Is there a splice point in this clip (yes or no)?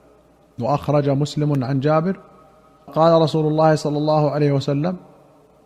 yes